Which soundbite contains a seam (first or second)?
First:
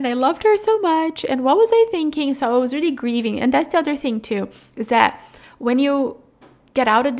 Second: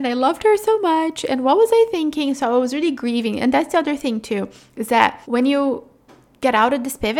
second